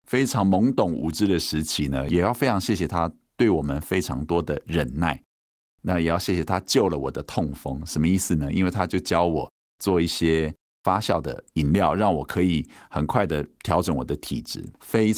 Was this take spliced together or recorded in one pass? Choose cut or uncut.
uncut